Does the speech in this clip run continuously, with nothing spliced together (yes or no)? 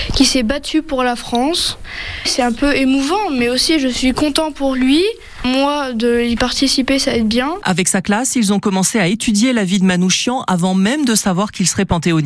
yes